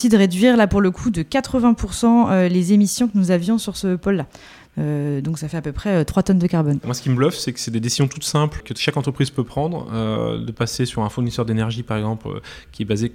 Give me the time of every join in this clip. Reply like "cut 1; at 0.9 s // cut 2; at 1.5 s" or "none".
cut 1; at 8.6 s